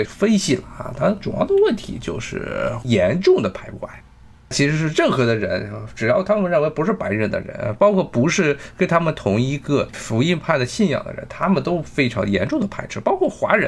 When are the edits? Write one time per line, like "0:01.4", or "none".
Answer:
none